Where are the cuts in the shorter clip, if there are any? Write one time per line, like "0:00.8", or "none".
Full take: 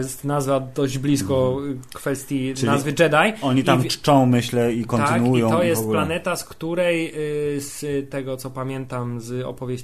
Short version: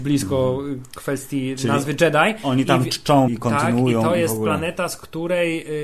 0:03.3

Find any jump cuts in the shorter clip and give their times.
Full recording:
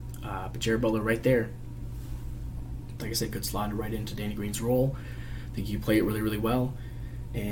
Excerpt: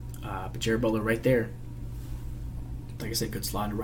none

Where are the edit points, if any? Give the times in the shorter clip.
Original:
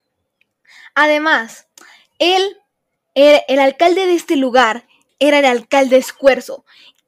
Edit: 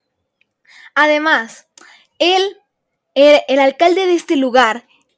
none

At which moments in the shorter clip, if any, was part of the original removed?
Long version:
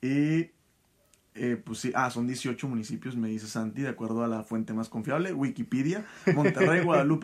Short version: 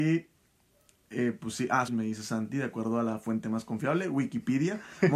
0:01.9

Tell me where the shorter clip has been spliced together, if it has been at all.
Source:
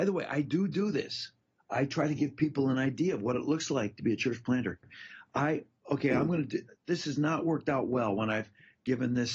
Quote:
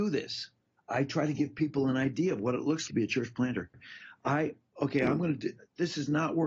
0:02.9

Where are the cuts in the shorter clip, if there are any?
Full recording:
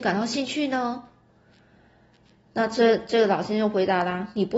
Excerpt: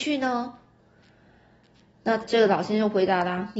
0:02.2

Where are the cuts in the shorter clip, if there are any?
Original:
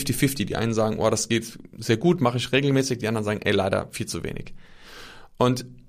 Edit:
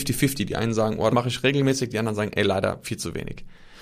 0:01.1

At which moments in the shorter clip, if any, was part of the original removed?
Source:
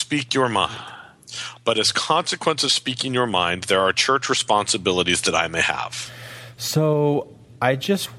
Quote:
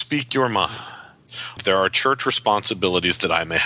0:01.6

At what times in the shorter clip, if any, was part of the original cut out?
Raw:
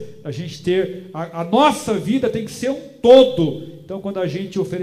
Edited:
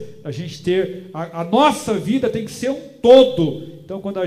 none

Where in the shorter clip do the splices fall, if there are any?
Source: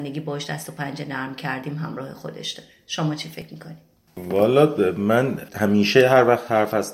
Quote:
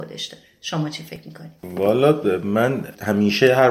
0:01.6

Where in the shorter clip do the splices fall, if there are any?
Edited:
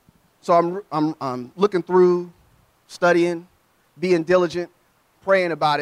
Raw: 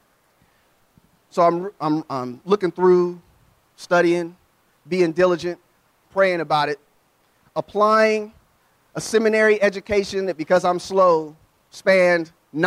none

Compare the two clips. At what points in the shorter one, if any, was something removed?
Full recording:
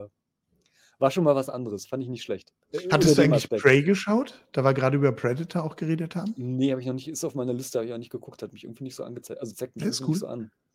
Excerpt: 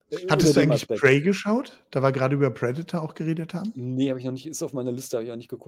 none

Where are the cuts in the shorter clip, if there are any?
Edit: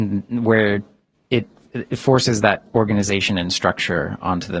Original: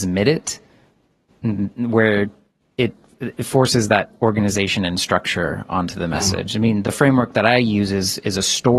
none

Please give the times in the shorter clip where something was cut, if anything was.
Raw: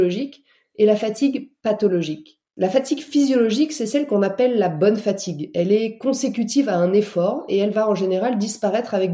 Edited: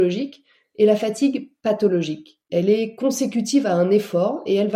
0:02.5

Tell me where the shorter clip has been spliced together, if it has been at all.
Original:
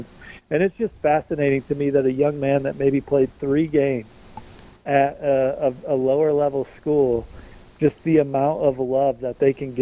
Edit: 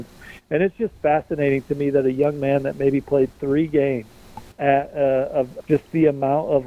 0:04.5
0:05.6

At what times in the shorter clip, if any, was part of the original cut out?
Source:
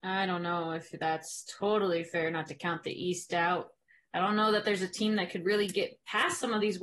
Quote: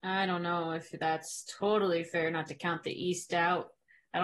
none

